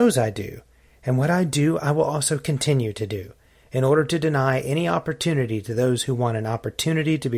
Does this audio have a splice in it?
no; 0 cuts

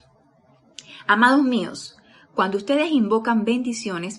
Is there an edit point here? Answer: no; 0 cuts

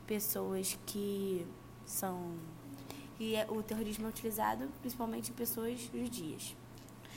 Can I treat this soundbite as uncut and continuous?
yes; 0 cuts

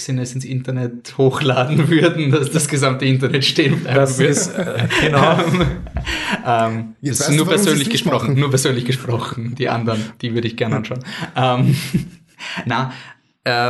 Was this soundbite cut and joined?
no; 0 cuts

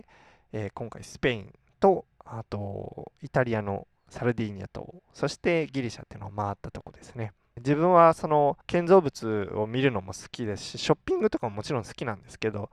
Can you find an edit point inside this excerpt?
yes; 2 cuts; at 7.6 s, 8.6 s

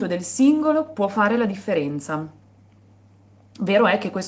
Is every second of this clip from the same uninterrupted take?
yes; 0 cuts

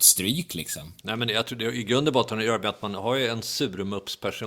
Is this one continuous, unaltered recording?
no; 1 cut; at 1.0 s

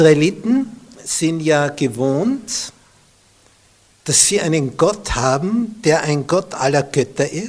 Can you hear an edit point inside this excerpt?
no; 0 cuts

